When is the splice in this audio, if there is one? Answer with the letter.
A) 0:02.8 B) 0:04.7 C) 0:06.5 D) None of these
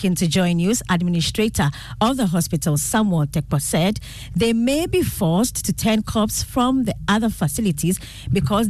D